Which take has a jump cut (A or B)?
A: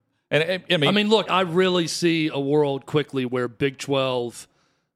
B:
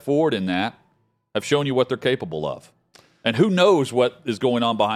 A